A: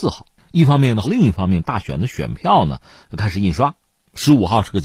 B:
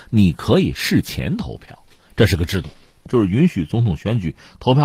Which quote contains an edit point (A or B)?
A